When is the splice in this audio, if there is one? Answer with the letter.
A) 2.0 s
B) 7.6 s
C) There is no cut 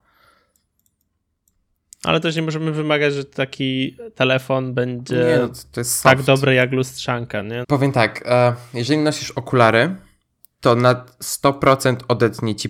B